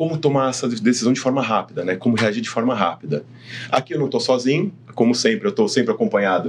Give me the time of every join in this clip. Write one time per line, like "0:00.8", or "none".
none